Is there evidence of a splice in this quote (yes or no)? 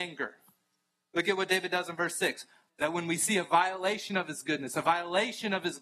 yes